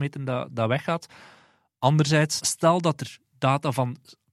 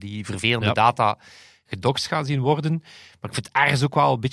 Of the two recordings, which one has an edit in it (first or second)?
first